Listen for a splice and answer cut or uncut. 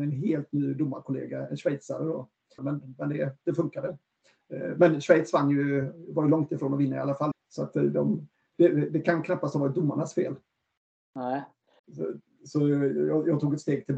cut